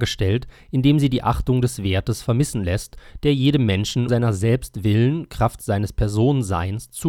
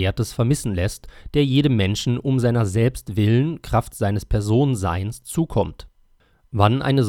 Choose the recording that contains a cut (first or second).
first